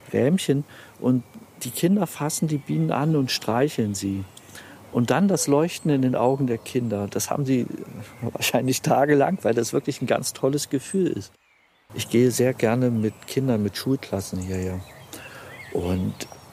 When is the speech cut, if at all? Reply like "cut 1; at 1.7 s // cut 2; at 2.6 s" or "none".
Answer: cut 1; at 11.9 s